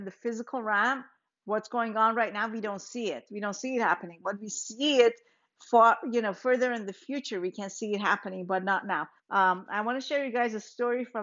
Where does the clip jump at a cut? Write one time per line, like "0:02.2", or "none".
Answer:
0:09.2